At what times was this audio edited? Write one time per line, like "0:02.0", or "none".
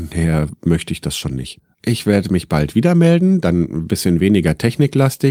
0:01.7